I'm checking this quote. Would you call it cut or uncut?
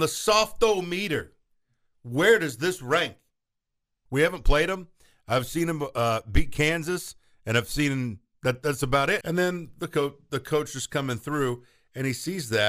cut